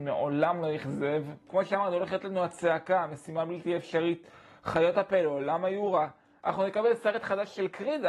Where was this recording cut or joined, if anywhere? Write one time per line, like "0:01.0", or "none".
0:01.5